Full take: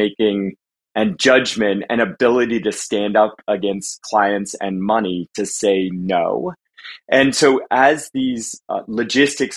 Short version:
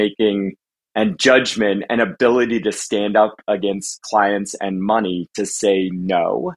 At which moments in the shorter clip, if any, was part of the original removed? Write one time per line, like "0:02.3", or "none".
none